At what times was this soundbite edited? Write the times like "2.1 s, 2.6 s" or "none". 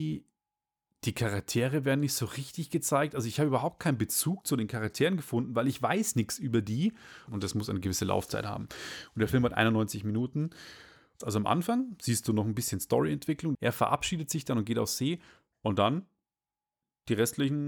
7.3 s, 11.2 s, 13.5 s